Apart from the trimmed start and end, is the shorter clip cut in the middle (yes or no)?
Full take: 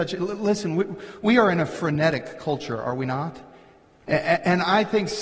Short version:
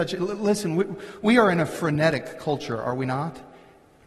no